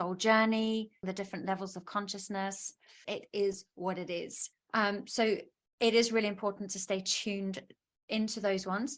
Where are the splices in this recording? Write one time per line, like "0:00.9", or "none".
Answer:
0:01.0
0:03.0
0:04.5